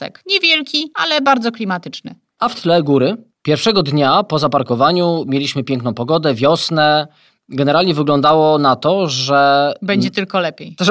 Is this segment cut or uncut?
uncut